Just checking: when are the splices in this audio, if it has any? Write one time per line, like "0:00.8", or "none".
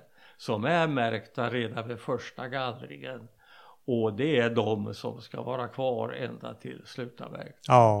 none